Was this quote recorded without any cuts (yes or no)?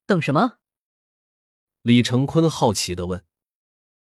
yes